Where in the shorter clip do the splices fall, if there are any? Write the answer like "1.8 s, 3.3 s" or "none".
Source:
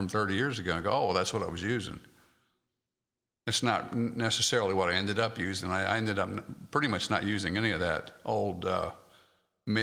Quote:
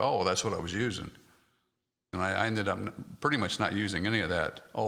2.1 s